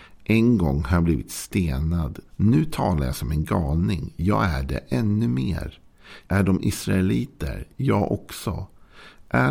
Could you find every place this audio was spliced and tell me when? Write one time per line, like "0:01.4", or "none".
0:02.3
0:06.2